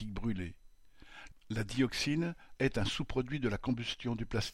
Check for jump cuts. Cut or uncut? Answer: cut